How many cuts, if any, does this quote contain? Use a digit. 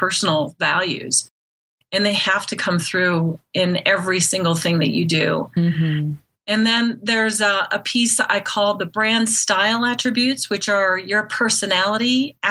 0